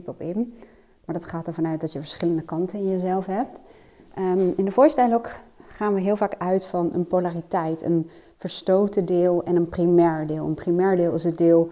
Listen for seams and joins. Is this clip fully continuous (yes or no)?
yes